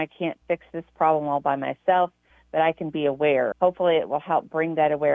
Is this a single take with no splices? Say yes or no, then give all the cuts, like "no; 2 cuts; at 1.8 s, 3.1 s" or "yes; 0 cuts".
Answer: no; 1 cut; at 3.5 s